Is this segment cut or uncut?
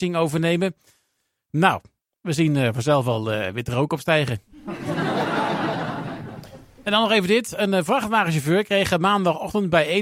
uncut